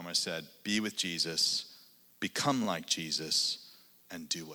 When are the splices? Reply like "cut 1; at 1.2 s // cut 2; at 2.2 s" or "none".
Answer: none